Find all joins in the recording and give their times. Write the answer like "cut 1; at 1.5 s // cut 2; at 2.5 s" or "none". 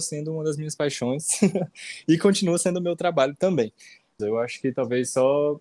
cut 1; at 4.2 s